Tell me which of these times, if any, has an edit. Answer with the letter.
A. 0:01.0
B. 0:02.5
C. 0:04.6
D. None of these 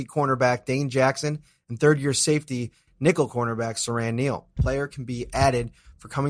C